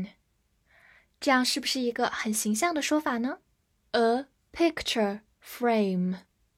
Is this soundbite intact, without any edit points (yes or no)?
no